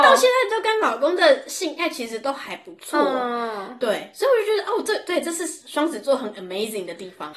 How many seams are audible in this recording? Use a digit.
0